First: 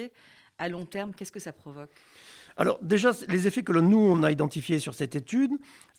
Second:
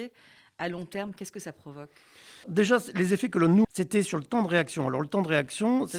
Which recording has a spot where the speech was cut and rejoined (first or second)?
second